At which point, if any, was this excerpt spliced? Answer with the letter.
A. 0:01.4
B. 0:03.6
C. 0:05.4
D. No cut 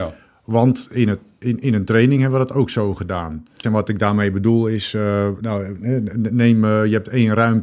B